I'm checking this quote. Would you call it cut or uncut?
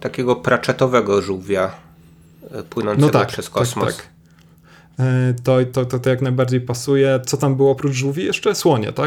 uncut